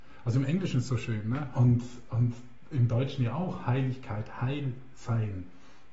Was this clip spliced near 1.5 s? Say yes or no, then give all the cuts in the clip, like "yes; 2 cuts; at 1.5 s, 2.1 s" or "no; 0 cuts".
yes; 1 cut; at 1.5 s